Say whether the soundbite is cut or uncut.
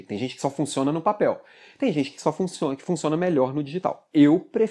uncut